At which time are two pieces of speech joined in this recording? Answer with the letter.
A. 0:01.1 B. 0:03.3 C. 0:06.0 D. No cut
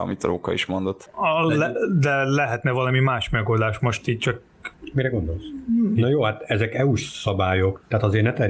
C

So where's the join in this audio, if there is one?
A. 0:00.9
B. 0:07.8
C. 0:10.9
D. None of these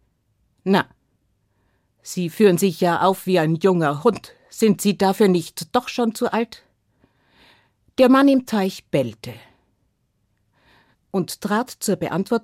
C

